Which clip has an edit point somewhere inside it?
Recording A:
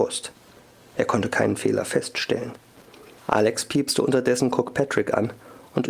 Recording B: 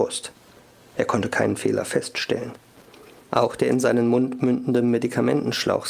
A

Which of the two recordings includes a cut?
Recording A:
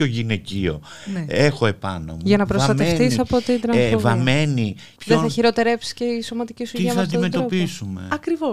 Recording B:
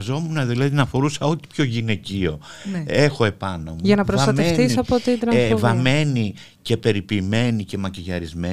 A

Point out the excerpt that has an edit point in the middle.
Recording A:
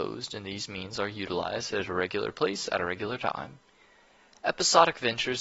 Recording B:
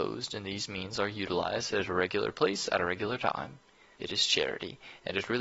B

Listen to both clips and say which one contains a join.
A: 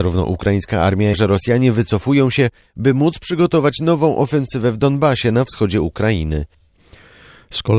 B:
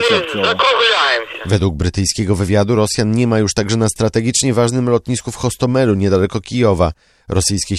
A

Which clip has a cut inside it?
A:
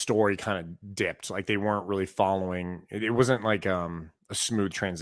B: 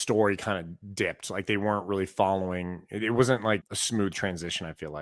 B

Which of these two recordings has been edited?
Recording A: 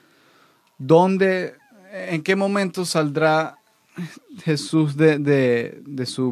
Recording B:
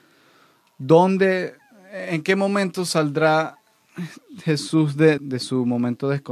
B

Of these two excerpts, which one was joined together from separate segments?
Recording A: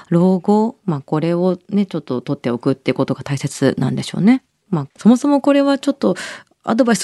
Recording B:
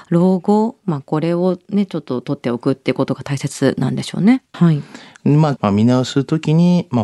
B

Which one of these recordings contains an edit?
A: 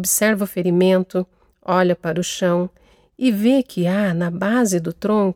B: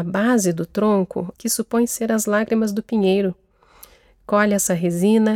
B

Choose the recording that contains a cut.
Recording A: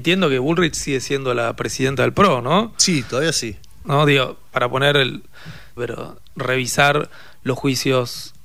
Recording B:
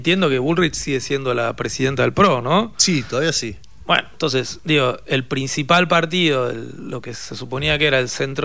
A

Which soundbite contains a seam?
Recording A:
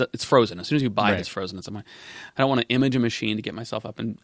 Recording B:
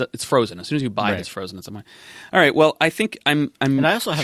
A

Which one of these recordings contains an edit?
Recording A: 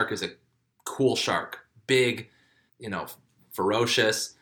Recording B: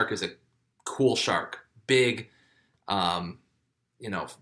A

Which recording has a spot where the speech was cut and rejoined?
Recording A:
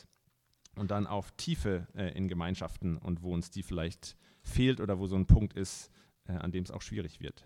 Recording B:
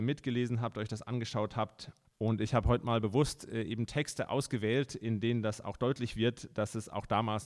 B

